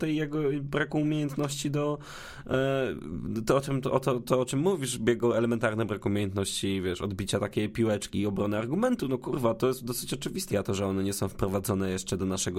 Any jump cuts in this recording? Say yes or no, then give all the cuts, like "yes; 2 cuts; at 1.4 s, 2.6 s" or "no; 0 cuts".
yes; 2 cuts; at 8.1 s, 10.5 s